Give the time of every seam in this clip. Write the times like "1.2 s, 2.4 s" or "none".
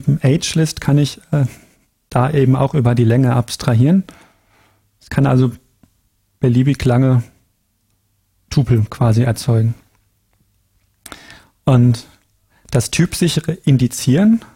none